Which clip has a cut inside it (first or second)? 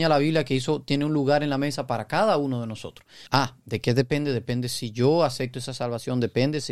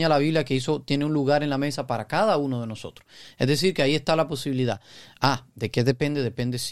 first